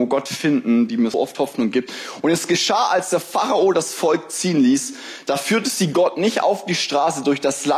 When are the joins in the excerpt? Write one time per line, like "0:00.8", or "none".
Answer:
0:01.1